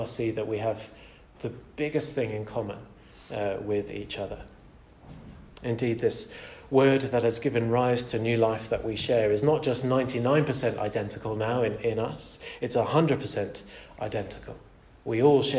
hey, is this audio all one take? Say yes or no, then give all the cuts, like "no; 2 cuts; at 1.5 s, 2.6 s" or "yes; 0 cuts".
yes; 0 cuts